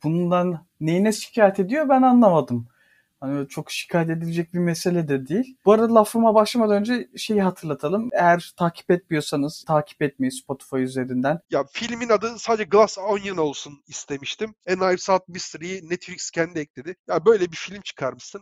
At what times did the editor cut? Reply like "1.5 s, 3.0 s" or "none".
9.6 s, 11.4 s, 17.0 s